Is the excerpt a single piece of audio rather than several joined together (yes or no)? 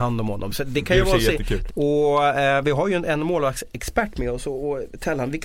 no